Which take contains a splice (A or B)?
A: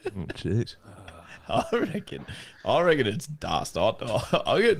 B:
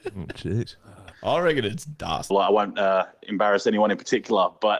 B